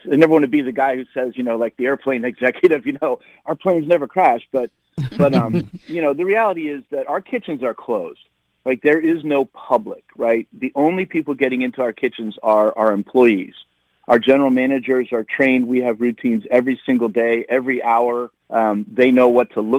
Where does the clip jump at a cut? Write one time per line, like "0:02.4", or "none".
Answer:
0:18.4